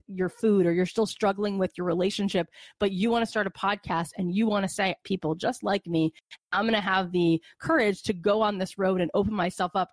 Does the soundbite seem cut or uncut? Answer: cut